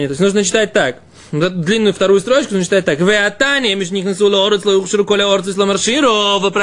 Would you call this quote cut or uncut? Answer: uncut